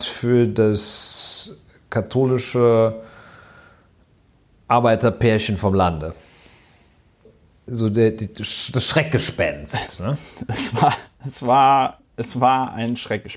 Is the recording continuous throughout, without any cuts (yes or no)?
yes